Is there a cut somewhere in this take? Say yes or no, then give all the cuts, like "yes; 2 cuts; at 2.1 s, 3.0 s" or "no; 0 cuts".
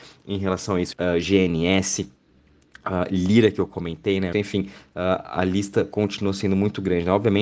yes; 2 cuts; at 0.9 s, 4.3 s